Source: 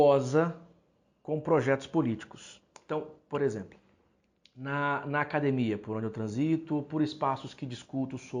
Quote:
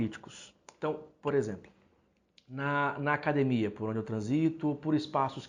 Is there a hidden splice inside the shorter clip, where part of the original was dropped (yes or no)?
no